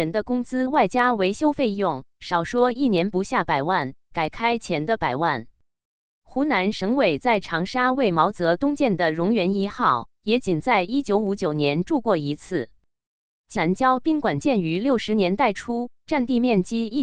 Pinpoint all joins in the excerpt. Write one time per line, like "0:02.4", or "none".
0:13.6